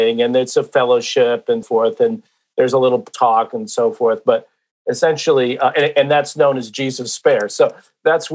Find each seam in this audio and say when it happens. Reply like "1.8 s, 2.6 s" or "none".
1.6 s